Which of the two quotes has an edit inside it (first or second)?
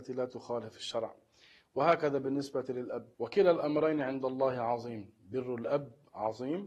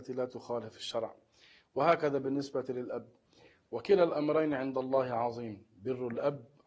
first